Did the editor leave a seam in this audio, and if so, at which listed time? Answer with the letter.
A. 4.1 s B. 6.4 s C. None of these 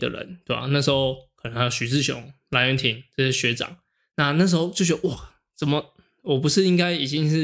C